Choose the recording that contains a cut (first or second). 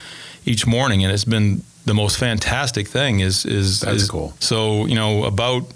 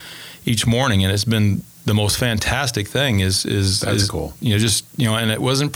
first